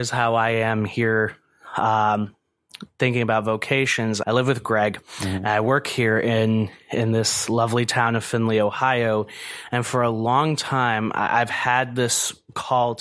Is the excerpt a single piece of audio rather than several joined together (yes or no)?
no